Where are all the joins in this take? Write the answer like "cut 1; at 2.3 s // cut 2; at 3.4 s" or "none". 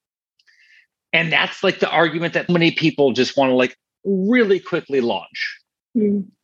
cut 1; at 2.5 s